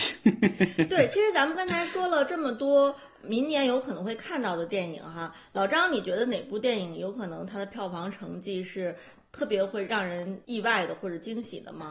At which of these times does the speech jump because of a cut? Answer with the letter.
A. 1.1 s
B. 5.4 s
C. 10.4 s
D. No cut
C